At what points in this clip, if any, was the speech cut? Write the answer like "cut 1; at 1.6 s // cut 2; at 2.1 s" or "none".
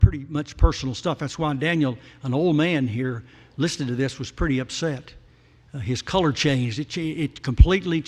none